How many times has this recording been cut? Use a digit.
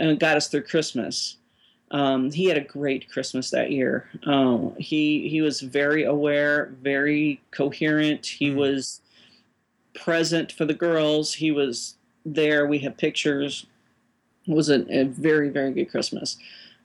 0